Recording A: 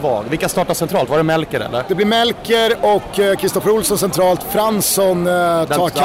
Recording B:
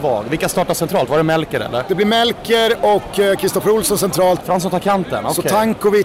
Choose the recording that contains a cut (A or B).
B